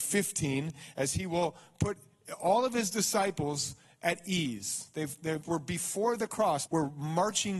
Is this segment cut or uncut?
cut